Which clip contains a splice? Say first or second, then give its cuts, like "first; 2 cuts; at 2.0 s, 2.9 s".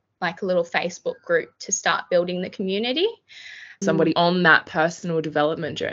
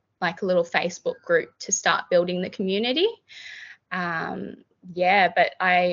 first; 1 cut; at 3.8 s